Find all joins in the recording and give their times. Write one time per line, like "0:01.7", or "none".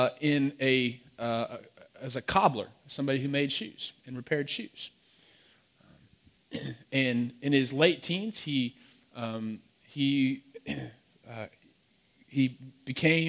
none

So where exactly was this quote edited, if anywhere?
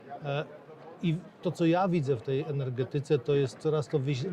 none

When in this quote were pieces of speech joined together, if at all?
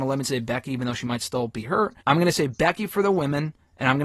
0:02.0

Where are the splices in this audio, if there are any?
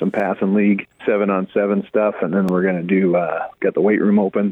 none

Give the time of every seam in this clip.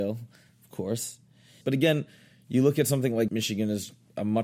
0:01.6
0:03.3

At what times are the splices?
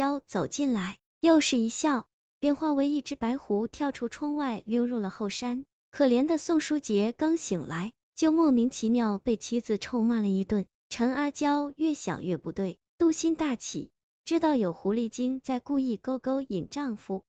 0:10.8

